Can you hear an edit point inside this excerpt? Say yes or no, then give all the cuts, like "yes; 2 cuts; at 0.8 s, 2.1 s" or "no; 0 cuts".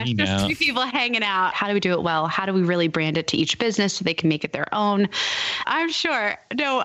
yes; 2 cuts; at 1.5 s, 5.6 s